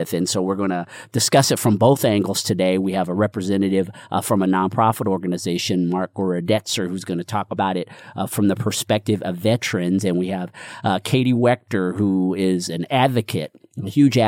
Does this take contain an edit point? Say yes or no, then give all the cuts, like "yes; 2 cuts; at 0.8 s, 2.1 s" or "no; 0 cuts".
no; 0 cuts